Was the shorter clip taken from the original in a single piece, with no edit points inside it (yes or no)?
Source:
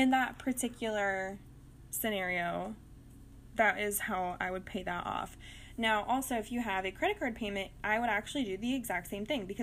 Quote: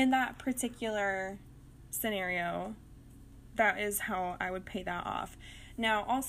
yes